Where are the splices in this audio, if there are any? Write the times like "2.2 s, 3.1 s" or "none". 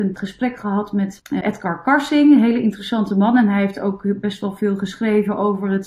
1.4 s